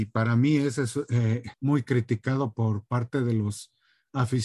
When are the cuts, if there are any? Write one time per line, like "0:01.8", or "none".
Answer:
0:01.5